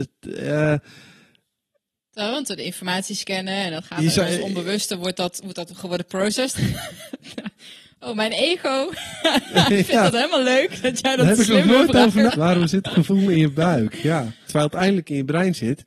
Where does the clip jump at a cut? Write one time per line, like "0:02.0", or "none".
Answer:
0:06.5
0:12.3
0:14.5